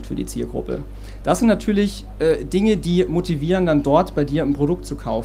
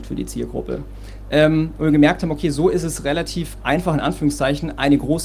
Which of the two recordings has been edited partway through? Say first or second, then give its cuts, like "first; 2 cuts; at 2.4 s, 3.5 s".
second; 1 cut; at 1.2 s